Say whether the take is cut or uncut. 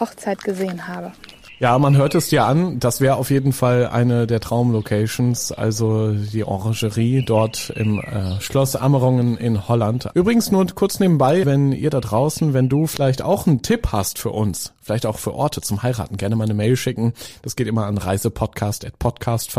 cut